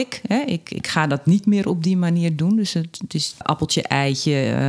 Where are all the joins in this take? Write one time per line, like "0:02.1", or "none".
0:03.4